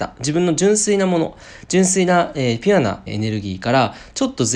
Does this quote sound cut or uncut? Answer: cut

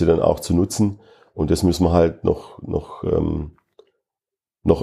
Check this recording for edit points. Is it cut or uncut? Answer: uncut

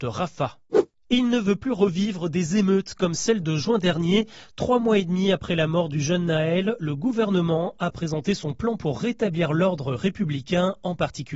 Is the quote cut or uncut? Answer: uncut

